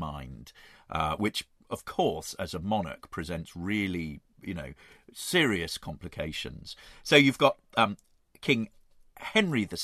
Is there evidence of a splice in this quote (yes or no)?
no